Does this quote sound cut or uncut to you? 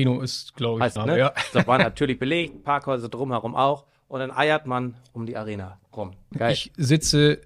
cut